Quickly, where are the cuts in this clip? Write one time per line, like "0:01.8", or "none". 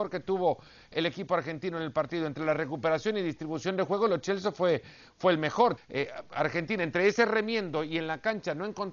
0:05.8